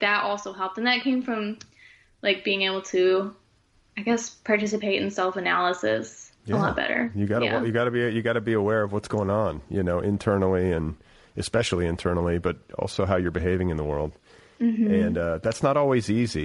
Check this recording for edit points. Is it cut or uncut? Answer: uncut